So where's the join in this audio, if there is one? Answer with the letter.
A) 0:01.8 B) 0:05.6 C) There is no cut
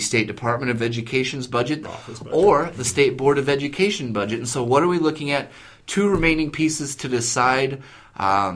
A